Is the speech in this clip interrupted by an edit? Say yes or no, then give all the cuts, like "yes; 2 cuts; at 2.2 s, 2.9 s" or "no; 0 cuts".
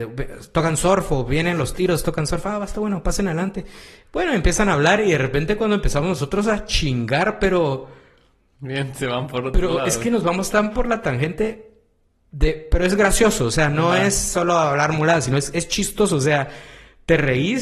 no; 0 cuts